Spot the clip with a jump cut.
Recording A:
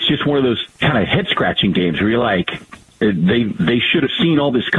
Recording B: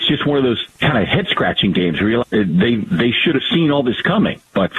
B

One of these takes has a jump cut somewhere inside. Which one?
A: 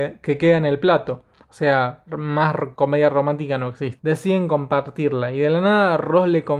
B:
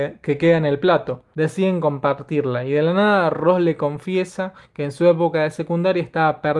B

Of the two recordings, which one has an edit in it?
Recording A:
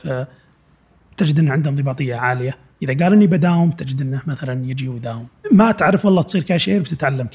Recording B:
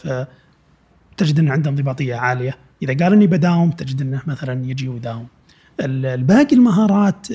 A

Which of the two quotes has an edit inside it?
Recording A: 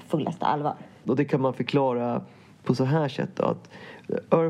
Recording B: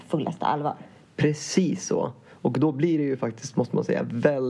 A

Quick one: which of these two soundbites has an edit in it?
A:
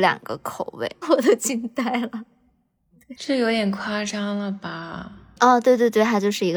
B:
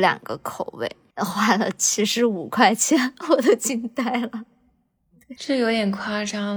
A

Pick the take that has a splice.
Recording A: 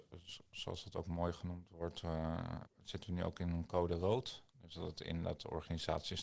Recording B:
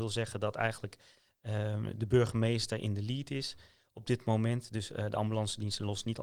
A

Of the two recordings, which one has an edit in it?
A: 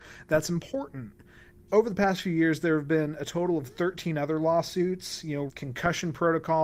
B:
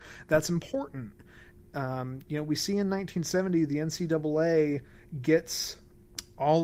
A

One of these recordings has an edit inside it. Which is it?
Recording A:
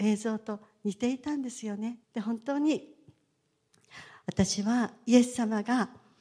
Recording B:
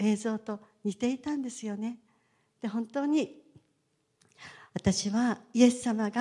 A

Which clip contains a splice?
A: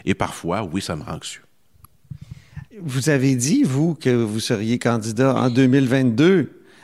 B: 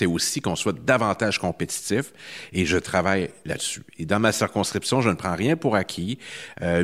A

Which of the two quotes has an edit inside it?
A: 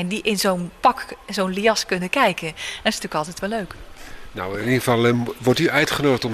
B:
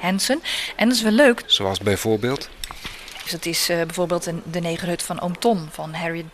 B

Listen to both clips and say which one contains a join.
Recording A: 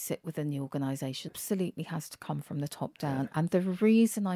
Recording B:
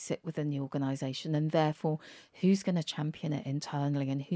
A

